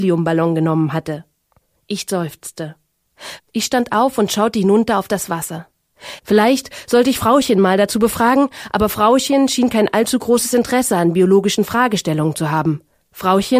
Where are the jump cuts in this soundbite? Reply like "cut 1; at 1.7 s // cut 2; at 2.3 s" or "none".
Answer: cut 1; at 3.4 s // cut 2; at 6.2 s